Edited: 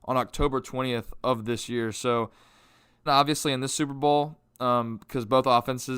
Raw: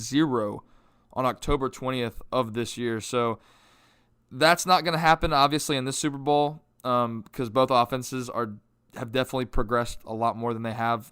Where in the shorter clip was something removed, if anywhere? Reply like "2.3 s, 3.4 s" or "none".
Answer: 3.1 s